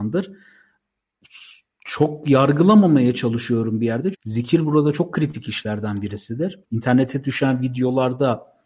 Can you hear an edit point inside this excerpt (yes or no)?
yes